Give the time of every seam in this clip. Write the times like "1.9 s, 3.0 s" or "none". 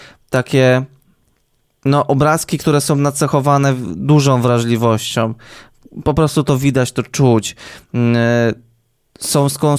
none